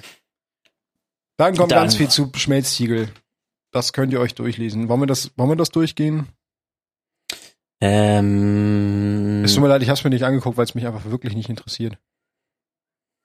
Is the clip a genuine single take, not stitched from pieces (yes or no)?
yes